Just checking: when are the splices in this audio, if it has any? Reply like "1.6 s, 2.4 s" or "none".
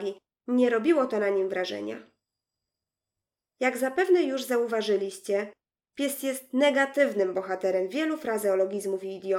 none